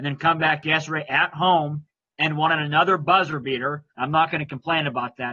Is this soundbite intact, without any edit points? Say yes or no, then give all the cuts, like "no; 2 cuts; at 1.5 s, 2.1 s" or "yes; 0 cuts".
no; 1 cut; at 3.9 s